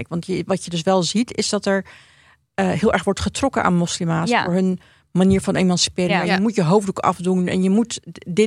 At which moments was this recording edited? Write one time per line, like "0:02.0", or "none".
0:06.1